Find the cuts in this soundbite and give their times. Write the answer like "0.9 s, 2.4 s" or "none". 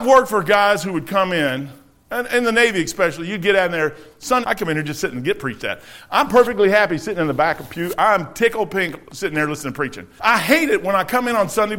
4.4 s, 10.2 s